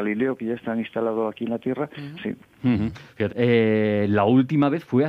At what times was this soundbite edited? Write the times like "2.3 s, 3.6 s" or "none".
2.2 s, 3.3 s